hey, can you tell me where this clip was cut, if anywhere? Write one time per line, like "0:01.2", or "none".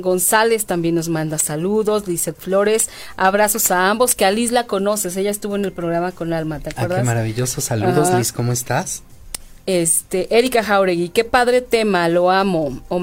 none